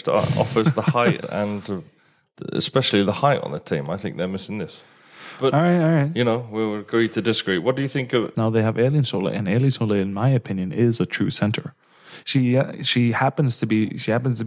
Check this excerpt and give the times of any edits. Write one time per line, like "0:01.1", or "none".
0:01.2
0:08.3